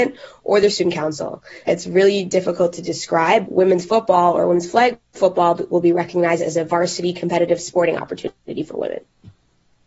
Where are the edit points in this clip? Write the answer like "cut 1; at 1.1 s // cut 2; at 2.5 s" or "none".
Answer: cut 1; at 1.6 s // cut 2; at 3.4 s